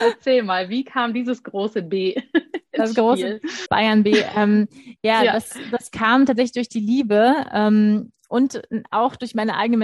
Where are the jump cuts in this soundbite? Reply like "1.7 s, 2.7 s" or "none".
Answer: 3.7 s